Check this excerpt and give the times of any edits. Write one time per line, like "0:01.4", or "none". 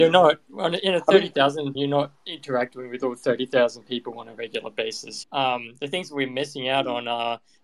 0:01.7
0:05.2